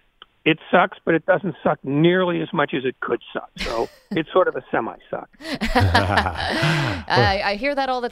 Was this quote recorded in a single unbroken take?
yes; 0 cuts

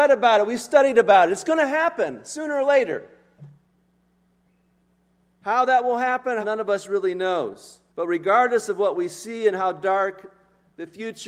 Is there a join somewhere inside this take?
yes; 2 cuts; at 6.4 s, 7.9 s

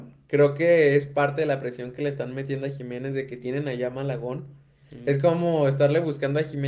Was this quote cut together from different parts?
yes; 1 cut; at 4.8 s

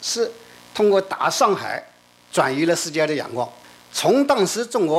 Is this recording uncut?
yes; 0 cuts

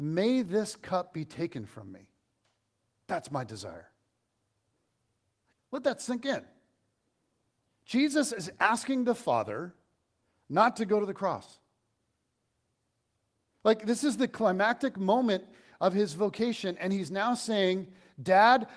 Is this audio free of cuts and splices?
yes; 0 cuts

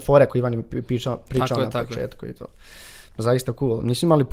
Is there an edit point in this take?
no; 0 cuts

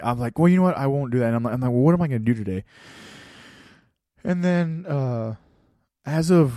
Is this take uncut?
yes; 0 cuts

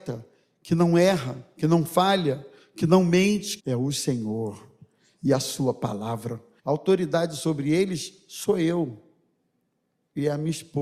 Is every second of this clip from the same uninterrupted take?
no; 2 cuts; at 3.6 s, 6.6 s

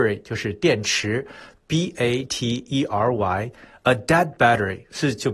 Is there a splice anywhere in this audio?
yes; 1 cut; at 2.3 s

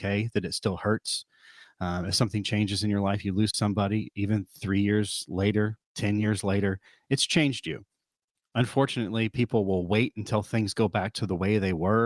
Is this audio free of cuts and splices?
yes; 0 cuts

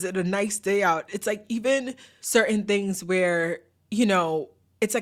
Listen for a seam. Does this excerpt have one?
yes; 1 cut; at 1.1 s

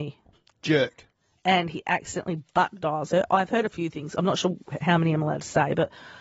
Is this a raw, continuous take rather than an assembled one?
yes; 0 cuts

